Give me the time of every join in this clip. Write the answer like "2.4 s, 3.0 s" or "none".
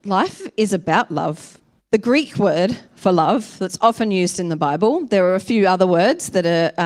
1.8 s